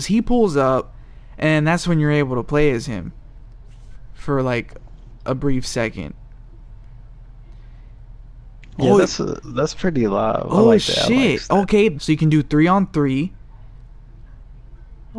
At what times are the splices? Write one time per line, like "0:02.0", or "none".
0:09.4
0:12.0